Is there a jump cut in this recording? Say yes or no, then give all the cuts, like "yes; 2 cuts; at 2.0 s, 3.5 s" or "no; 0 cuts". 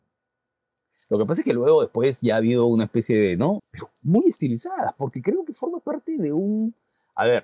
yes; 2 cuts; at 1.0 s, 3.6 s